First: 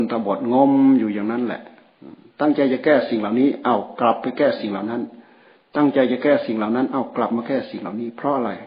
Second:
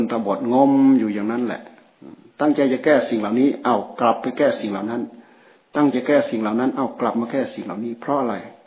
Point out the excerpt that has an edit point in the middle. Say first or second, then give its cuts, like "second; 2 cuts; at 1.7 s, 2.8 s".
second; 1 cut; at 5.9 s